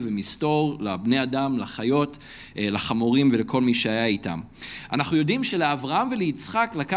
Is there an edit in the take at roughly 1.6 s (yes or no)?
no